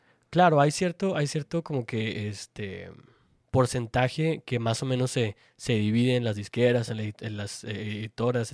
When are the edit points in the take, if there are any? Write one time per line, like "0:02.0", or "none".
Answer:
none